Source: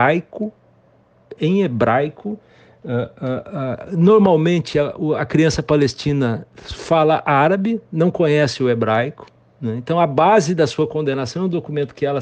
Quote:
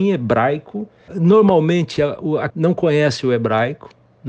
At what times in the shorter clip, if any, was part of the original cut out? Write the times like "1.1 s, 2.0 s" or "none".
1.1 s, 2.5 s